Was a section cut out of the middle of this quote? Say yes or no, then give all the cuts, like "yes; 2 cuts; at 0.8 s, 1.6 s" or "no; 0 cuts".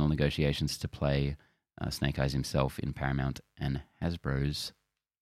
no; 0 cuts